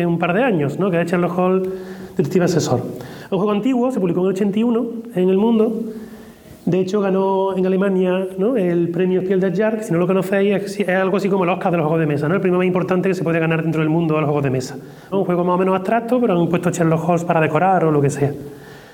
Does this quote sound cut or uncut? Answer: cut